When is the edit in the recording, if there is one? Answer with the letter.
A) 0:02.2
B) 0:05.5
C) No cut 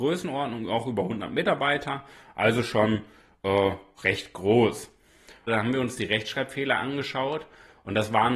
B